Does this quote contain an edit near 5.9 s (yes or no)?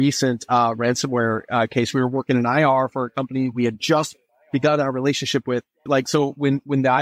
yes